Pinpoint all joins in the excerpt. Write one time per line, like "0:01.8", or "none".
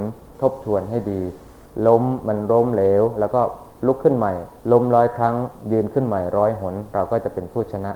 0:04.6